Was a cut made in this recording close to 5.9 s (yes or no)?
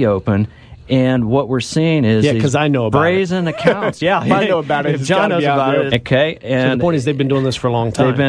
yes